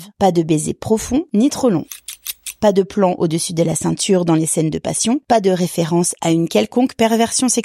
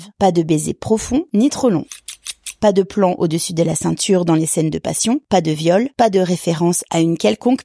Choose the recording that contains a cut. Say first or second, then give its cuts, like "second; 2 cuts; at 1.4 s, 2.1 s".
first; 1 cut; at 5.2 s